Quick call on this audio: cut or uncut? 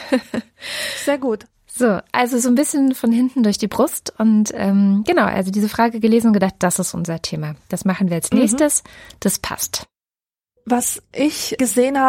uncut